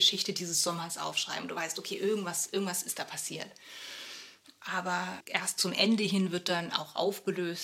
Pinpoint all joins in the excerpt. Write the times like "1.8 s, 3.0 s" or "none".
5.2 s